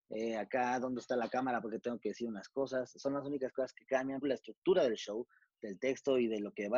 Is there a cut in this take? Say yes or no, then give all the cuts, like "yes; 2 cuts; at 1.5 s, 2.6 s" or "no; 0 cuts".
yes; 1 cut; at 4.2 s